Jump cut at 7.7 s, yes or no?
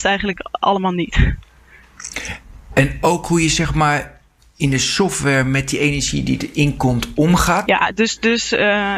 yes